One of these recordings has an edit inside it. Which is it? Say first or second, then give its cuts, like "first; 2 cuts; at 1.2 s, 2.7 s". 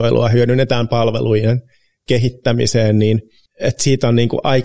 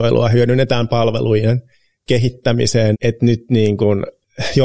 second; 1 cut; at 2.9 s